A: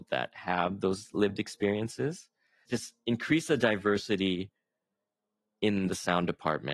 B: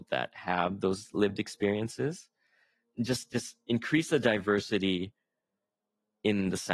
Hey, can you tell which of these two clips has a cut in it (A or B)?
A